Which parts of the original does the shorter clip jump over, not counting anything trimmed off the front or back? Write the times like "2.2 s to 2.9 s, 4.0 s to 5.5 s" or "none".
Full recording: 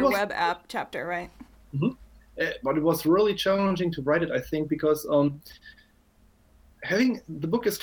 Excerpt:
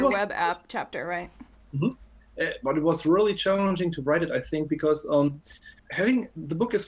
5.8 s to 6.7 s